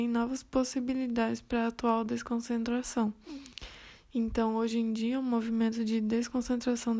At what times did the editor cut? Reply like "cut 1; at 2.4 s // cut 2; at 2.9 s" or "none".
none